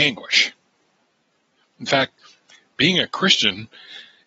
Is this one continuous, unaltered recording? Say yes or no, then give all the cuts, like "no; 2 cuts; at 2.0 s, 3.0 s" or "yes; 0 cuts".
yes; 0 cuts